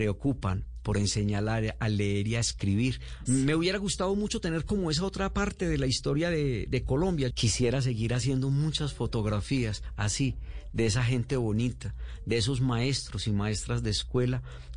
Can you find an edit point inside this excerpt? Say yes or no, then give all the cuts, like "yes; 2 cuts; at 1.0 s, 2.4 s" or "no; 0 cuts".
yes; 2 cuts; at 3.2 s, 7.3 s